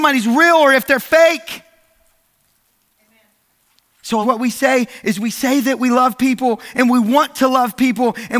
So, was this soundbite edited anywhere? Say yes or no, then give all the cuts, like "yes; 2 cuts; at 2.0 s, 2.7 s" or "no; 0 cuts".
yes; 2 cuts; at 3.0 s, 4.2 s